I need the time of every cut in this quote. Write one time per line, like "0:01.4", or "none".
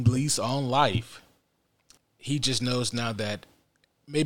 0:02.0